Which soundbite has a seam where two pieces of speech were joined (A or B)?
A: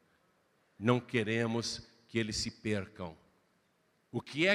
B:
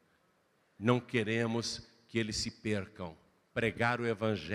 B